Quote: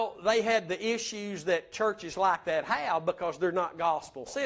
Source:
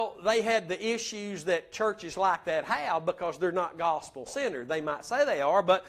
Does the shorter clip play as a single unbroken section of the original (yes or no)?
yes